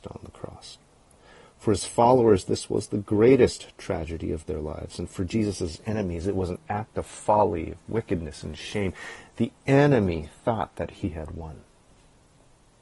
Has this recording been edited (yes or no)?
no